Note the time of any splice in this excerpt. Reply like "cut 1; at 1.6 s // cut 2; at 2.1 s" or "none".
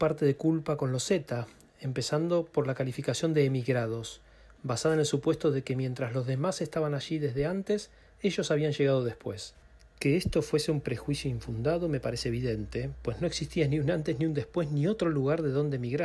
none